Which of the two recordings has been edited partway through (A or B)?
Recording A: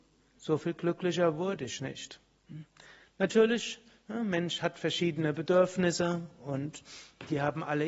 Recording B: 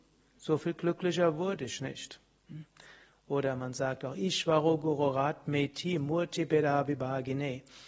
B